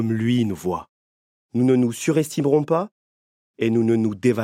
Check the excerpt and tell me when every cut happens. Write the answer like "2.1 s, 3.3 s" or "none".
1.4 s

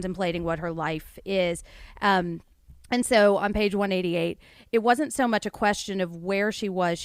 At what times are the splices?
none

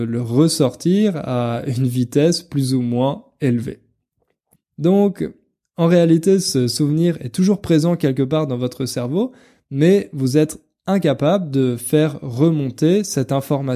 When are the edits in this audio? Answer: 4.6 s

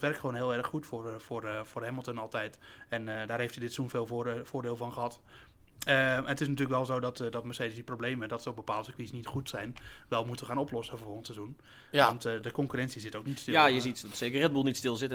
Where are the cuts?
none

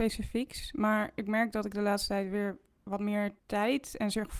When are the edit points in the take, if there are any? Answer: 3.4 s

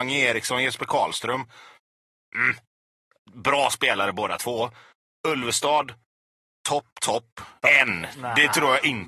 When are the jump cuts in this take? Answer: 7.6 s

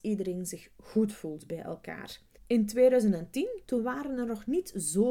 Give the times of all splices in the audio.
2.4 s, 3.6 s

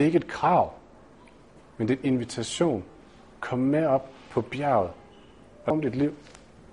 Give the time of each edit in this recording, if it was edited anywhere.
none

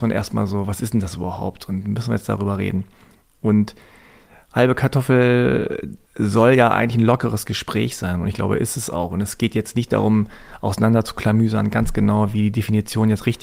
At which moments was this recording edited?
none

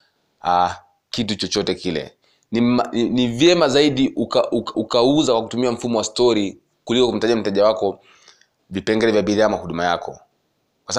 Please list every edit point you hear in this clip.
4.7 s

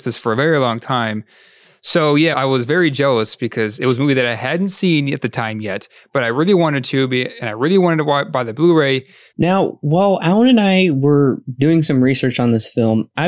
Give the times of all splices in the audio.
2.3 s, 9.3 s

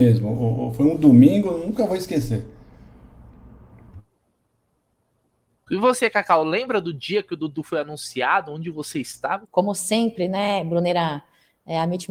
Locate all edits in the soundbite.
5.7 s, 9.4 s

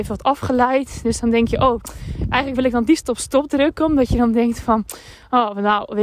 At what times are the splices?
none

